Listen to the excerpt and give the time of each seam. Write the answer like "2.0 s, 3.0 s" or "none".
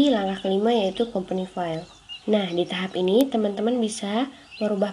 2.2 s